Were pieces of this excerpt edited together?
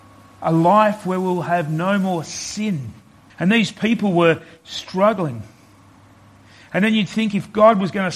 yes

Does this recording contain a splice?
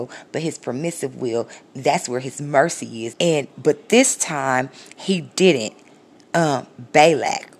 yes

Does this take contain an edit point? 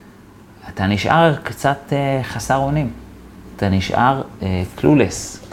no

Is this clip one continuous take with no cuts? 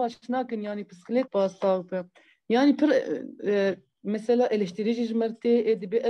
no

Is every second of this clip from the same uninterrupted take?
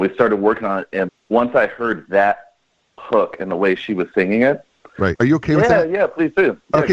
no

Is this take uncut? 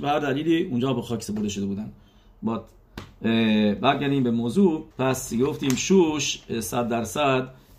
no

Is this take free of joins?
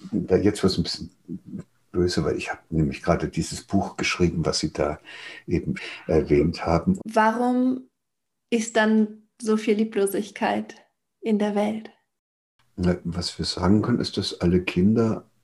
no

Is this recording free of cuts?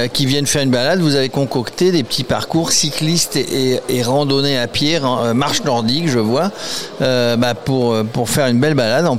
yes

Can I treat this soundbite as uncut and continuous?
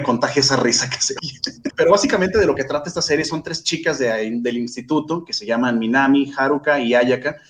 no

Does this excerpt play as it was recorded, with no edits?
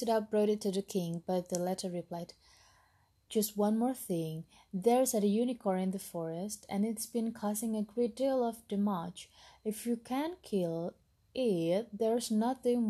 no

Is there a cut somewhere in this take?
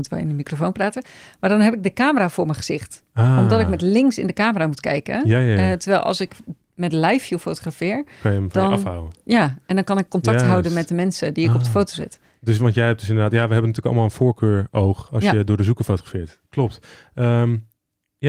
no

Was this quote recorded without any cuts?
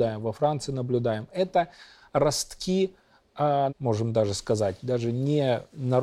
no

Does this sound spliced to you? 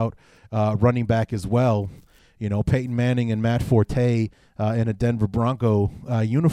no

